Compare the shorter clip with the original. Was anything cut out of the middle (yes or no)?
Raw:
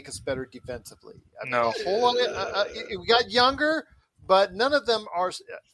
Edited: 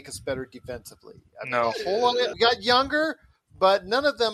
yes